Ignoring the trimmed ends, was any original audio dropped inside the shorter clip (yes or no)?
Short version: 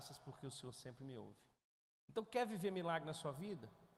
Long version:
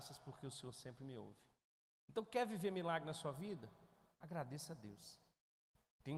no